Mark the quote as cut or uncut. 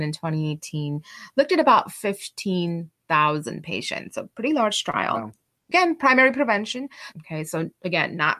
cut